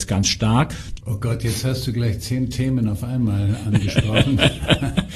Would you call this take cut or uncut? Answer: cut